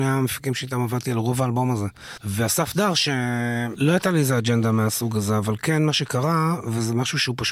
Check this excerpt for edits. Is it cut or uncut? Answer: cut